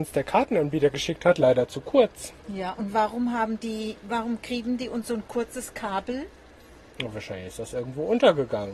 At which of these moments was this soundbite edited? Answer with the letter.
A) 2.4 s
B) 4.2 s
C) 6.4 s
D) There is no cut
A